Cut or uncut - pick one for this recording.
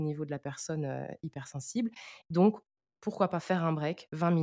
cut